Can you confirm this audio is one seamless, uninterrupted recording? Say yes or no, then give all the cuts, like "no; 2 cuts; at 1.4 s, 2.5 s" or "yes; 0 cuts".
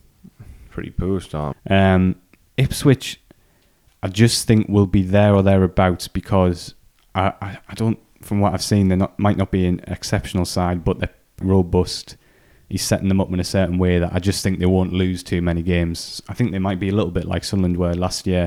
no; 2 cuts; at 1.5 s, 11.4 s